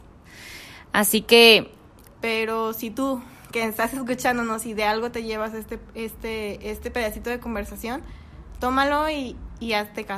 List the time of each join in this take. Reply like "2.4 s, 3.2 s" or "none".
2.2 s

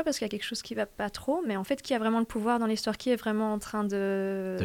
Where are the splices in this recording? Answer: none

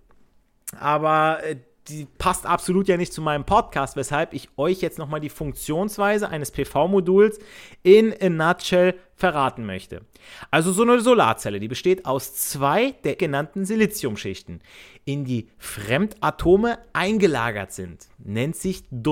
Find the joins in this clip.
13.2 s

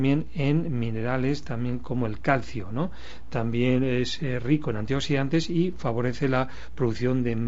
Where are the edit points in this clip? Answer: none

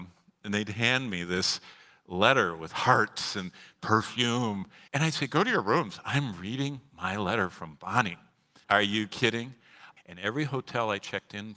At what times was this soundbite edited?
4.9 s, 8.6 s, 10.0 s

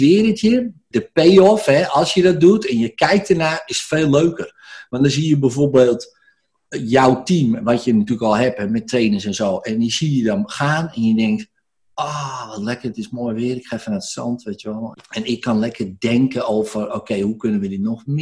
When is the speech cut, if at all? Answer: 0.9 s, 14.9 s

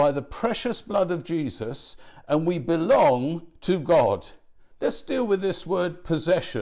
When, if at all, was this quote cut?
4.7 s

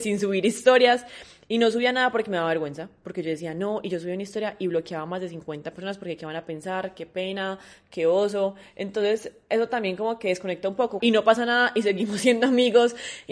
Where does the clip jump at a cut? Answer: 11.0 s

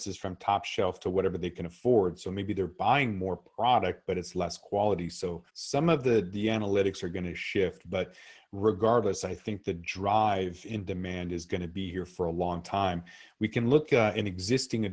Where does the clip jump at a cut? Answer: 5.5 s

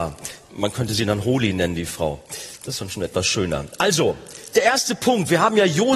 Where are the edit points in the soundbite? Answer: 4.5 s

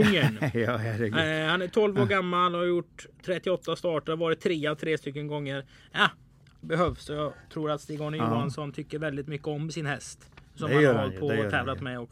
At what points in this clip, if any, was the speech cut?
6.6 s

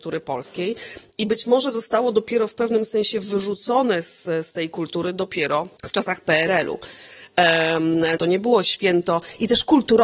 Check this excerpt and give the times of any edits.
5.8 s, 8.2 s

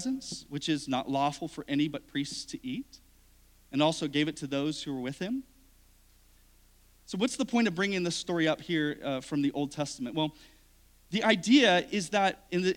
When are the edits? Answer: none

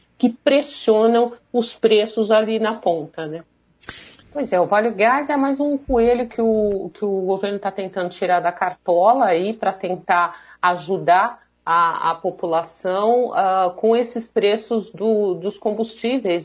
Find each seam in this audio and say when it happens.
4.2 s

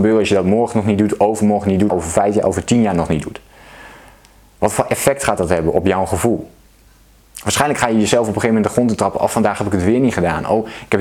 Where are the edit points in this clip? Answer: 1.9 s

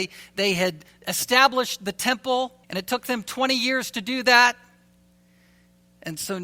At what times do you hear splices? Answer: 2.6 s

